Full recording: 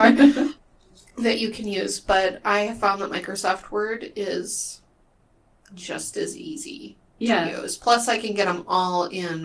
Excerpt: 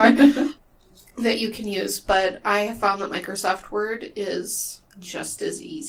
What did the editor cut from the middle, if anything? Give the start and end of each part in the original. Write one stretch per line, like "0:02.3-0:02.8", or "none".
0:04.9-0:05.6